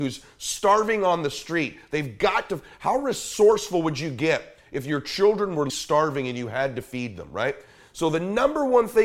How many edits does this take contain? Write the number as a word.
one